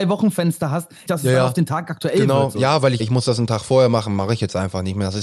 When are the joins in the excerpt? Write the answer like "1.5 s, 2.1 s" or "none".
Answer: 1.1 s, 3.0 s